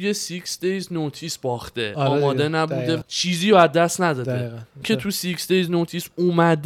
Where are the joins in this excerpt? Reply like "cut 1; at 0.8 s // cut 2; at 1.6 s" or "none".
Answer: cut 1; at 3.0 s // cut 2; at 4.8 s